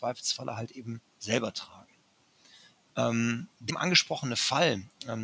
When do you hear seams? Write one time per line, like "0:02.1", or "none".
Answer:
0:01.1
0:03.7